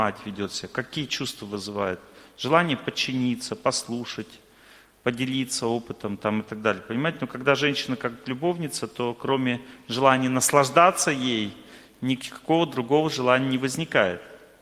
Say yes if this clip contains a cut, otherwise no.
no